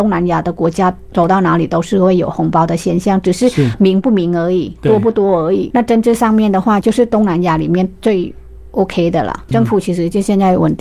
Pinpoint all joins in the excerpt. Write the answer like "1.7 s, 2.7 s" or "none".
5.7 s, 6.8 s, 9.5 s